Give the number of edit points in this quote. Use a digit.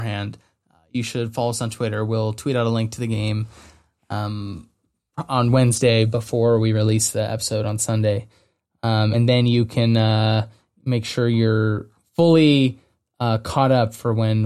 0